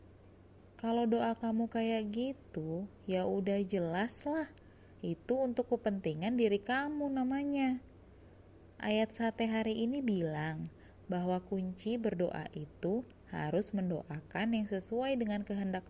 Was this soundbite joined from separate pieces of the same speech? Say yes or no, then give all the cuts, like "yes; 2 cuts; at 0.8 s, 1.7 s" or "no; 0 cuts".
no; 0 cuts